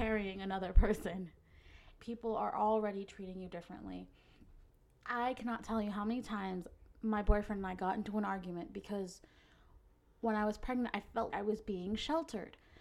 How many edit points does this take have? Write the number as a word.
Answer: two